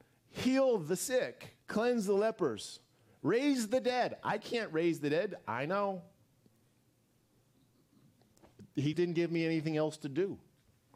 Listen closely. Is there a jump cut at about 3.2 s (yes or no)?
no